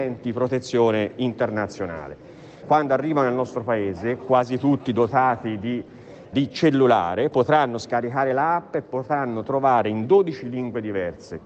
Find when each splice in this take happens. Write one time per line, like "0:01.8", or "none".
0:02.6
0:06.3